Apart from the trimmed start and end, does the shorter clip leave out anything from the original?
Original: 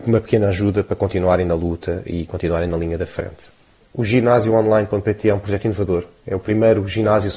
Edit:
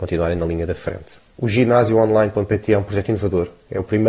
yes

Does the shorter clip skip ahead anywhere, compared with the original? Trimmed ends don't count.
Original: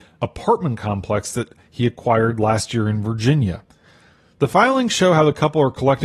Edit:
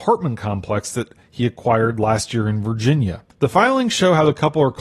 yes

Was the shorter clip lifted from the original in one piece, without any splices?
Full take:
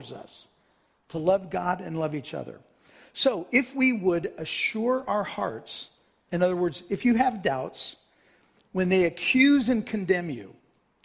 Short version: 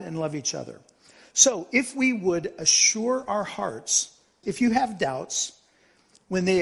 no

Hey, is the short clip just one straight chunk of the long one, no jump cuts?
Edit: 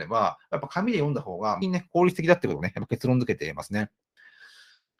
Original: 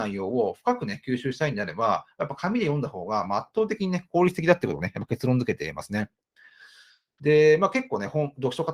no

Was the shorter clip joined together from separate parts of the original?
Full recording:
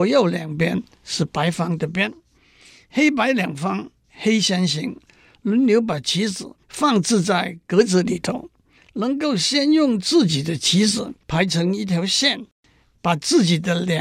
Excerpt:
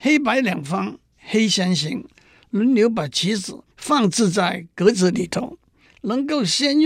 no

